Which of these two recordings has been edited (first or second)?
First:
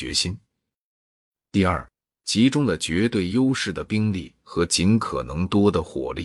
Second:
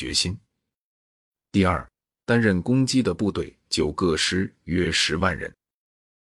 second